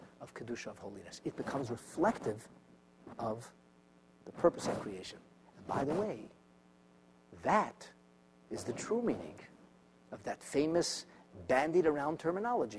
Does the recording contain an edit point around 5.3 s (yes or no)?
no